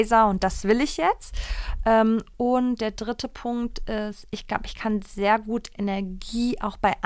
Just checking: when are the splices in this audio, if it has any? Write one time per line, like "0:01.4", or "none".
none